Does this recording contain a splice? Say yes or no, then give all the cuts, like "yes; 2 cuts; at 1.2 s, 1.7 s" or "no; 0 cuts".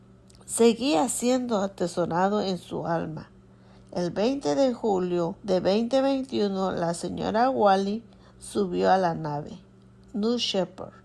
yes; 2 cuts; at 3.7 s, 5.4 s